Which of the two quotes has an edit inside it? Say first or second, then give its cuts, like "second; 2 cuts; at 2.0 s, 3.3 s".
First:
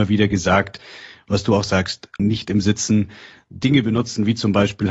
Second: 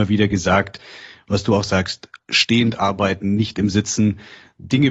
first; 1 cut; at 2.2 s